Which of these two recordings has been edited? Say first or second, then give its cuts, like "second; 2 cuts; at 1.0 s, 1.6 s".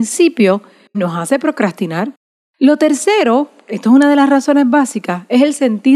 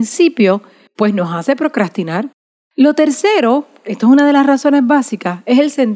first; 1 cut; at 0.9 s